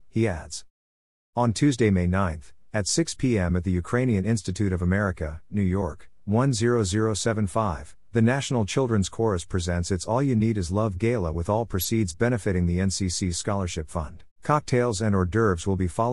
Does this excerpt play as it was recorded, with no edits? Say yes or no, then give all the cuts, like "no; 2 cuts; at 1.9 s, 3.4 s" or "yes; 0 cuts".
no; 2 cuts; at 5.5 s, 14.3 s